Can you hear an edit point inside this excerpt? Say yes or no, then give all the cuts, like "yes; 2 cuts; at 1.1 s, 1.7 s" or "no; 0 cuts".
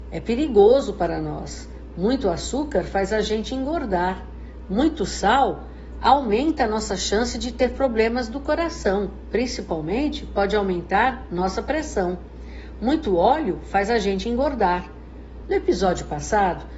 yes; 2 cuts; at 4.6 s, 15.4 s